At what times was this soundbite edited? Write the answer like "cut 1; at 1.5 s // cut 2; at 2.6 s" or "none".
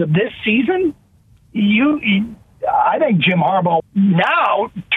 cut 1; at 3.8 s